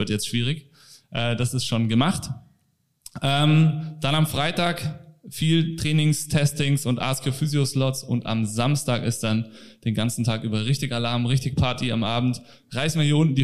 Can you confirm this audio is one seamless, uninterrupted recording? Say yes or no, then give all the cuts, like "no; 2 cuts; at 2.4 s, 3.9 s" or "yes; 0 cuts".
yes; 0 cuts